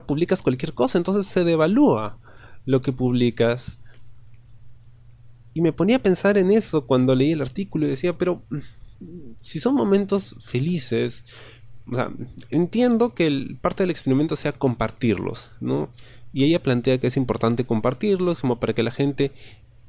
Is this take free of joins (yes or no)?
yes